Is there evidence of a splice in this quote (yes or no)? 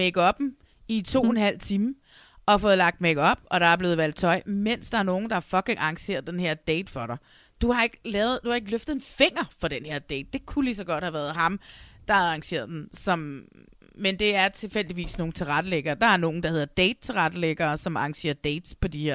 no